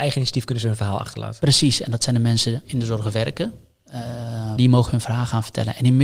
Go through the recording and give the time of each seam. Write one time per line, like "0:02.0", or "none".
0:02.6
0:04.6